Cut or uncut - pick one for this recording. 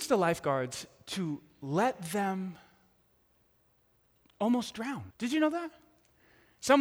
cut